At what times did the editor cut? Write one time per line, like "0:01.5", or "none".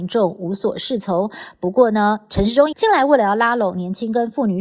0:02.7